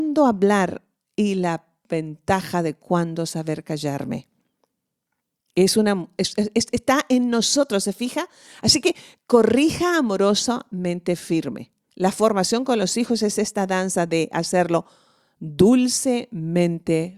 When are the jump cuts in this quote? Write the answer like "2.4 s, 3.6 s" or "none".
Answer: none

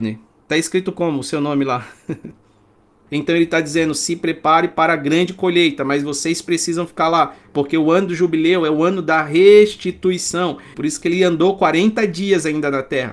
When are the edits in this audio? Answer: 3.1 s, 10.7 s

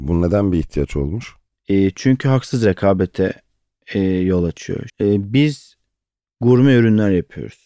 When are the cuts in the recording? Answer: 4.9 s

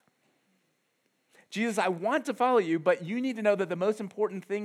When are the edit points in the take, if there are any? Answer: none

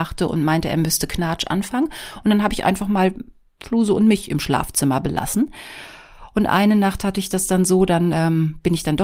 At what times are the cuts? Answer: none

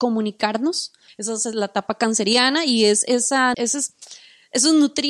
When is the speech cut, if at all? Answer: 1.1 s, 3.5 s

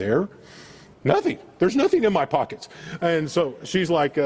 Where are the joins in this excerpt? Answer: 0.9 s

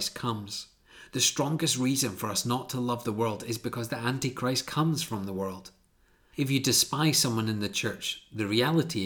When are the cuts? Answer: 6.3 s

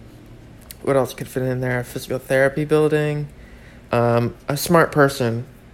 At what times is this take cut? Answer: 3.9 s

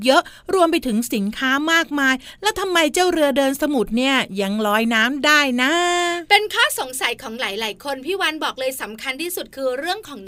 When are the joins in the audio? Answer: none

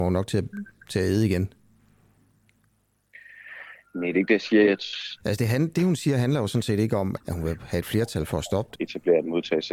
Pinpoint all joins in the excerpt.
5.2 s, 7.2 s, 8.7 s

